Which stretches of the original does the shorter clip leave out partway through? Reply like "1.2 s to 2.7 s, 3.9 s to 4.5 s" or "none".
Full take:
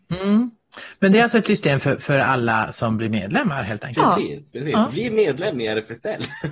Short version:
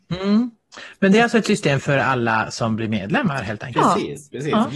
1.8 s to 2.0 s